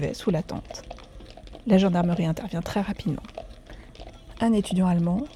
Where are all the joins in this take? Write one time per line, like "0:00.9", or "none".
none

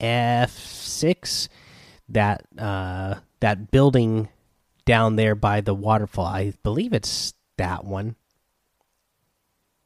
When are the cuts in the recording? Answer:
none

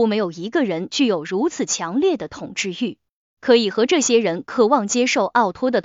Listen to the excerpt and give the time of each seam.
none

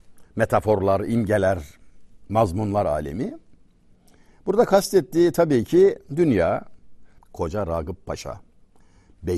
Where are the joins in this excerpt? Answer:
0:07.2

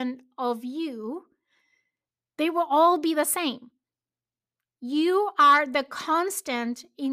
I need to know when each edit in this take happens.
none

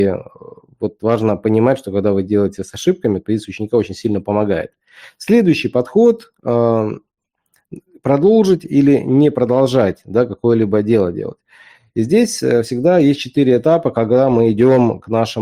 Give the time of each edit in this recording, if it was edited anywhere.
none

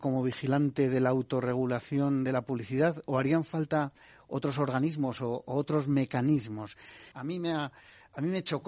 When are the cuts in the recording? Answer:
0:07.1

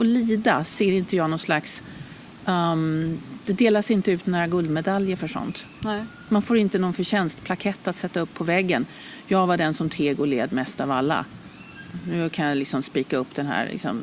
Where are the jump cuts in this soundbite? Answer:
none

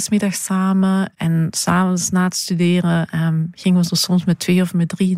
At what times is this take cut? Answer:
none

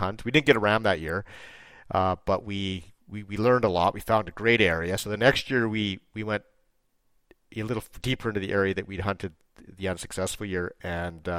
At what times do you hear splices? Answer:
none

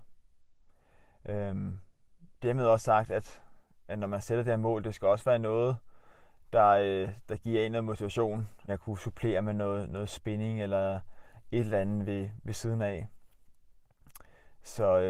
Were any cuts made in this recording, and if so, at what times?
0:08.7

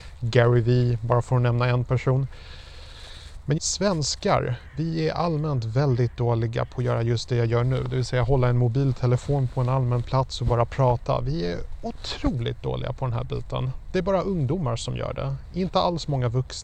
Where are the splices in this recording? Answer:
0:03.6

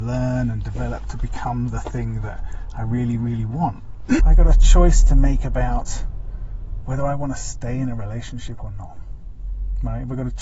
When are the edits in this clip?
0:04.2
0:06.8

